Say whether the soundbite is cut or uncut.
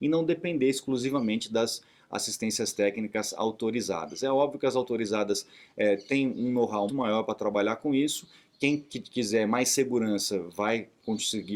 cut